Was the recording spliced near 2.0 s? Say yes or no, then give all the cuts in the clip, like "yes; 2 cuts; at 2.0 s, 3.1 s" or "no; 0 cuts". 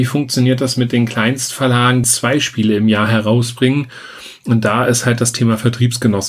yes; 1 cut; at 2.0 s